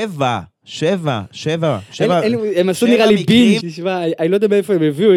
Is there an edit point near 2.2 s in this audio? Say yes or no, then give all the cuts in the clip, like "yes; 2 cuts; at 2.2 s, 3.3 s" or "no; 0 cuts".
no; 1 cut; at 3.6 s